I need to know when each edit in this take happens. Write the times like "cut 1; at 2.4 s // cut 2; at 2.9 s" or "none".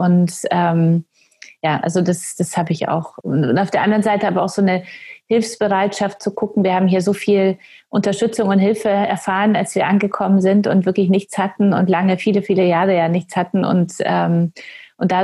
none